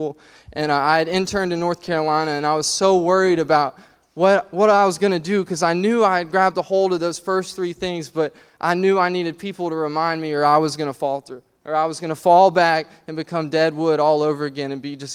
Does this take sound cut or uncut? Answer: uncut